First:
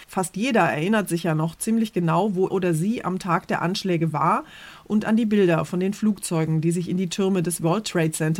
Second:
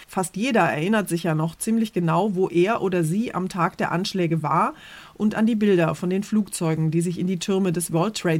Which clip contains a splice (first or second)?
first